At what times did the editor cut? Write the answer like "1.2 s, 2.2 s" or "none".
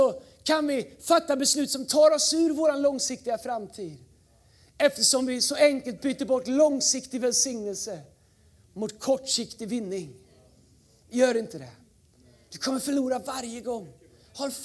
none